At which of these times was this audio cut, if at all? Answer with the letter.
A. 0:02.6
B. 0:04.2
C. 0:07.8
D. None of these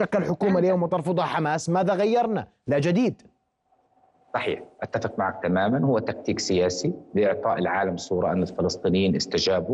D